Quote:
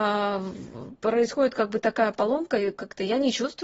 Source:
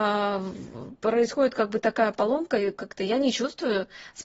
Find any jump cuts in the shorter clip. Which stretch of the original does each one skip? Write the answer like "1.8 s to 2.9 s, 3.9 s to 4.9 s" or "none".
none